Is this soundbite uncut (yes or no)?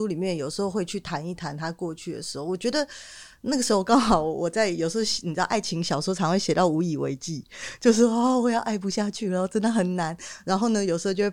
yes